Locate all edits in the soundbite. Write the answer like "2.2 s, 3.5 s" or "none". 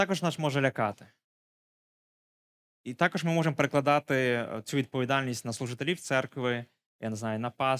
none